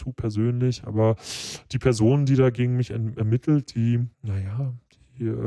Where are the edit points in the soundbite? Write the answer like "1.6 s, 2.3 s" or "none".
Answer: 4.1 s